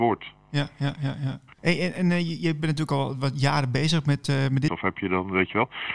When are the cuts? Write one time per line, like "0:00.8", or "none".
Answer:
0:01.6
0:04.7

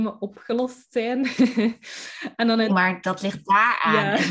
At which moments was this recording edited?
0:02.7

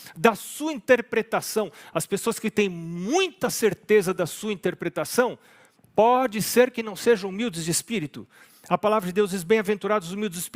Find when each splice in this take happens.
none

